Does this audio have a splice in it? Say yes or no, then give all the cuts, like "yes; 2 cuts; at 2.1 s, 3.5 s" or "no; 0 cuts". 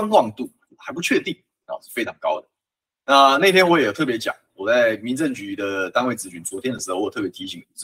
no; 0 cuts